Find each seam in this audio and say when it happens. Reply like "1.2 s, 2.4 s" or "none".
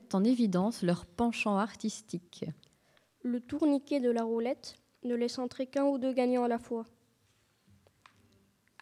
none